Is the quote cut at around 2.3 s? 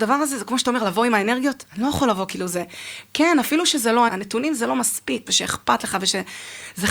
no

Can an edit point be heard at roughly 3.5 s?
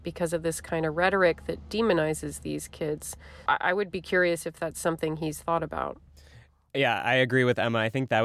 yes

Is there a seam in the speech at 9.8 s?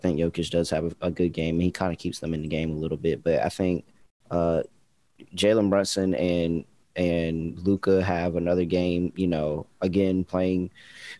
no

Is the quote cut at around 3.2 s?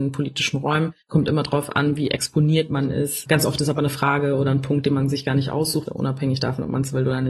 no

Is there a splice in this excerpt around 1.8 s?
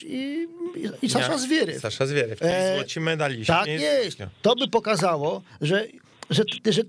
no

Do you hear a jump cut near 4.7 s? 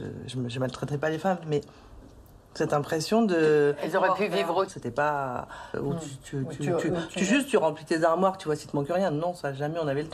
yes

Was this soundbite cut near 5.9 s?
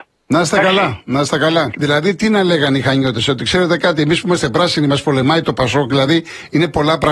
no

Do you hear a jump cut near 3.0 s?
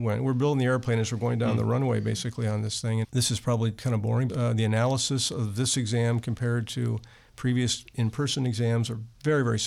yes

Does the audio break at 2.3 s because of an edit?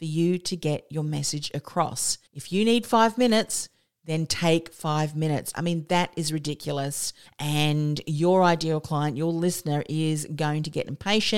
yes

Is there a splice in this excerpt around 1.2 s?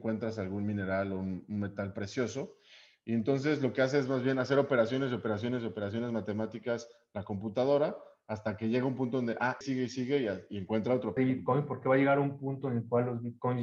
no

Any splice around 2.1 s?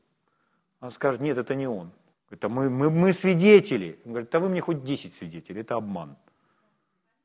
yes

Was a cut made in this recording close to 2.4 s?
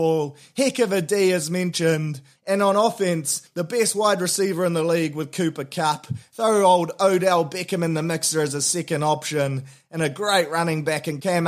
yes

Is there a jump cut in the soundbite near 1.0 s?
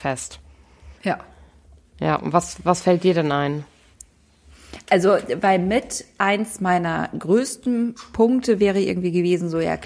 yes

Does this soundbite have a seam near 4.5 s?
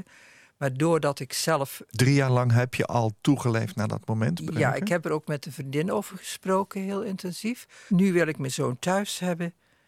yes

